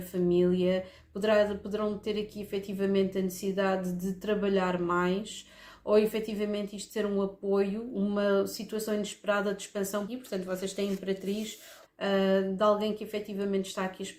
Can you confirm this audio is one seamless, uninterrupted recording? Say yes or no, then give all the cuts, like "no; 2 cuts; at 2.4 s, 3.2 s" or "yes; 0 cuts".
no; 2 cuts; at 10.1 s, 11.9 s